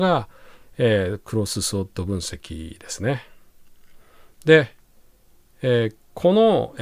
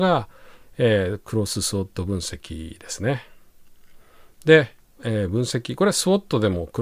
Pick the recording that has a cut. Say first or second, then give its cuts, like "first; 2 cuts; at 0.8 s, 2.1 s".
second; 1 cut; at 5.0 s